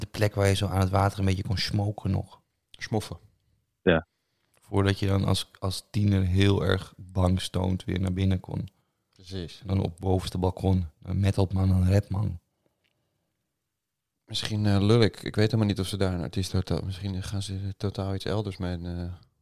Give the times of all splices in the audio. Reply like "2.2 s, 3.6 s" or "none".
none